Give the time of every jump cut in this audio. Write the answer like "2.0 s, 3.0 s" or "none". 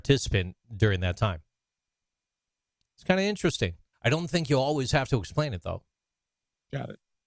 3.9 s